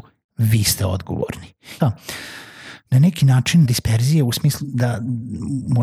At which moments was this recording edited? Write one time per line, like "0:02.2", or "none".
0:01.8
0:03.6